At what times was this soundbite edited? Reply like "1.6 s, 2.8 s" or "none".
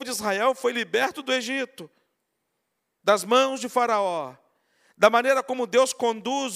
none

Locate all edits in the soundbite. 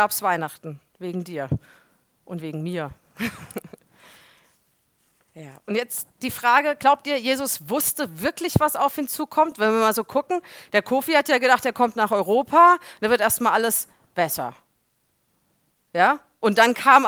none

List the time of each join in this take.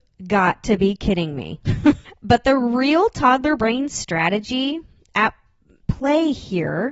2.0 s

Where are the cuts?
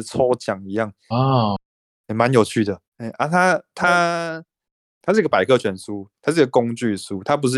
1.1 s, 2.9 s

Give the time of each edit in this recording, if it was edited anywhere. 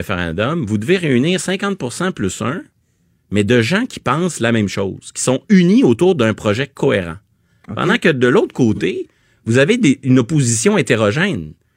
none

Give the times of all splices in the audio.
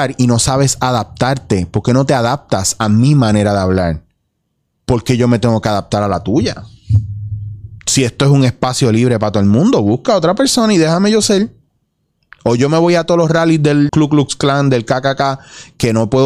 13.9 s

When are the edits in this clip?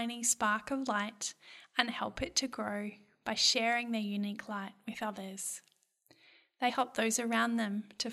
6.7 s

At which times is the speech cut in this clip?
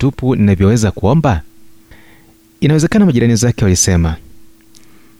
none

